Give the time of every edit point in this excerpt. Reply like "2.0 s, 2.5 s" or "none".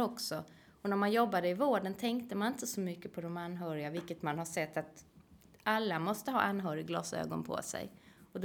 none